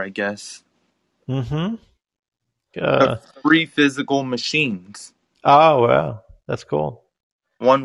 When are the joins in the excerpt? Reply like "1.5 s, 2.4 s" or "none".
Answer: 2.7 s